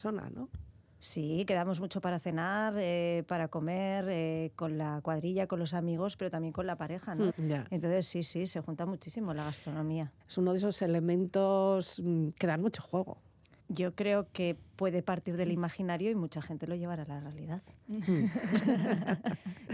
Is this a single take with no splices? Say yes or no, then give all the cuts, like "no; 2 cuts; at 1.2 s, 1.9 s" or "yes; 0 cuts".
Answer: no; 3 cuts; at 7.3 s, 10.2 s, 13.6 s